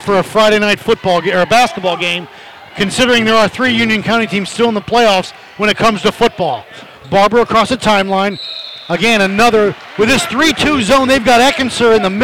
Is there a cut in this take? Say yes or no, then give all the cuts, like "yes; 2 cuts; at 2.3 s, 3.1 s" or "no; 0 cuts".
no; 0 cuts